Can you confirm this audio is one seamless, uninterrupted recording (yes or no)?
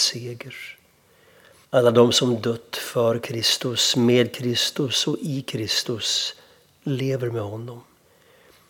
no